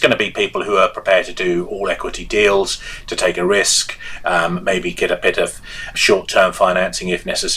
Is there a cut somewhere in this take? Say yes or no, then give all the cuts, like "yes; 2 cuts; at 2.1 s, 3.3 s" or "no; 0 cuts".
yes; 1 cut; at 5.9 s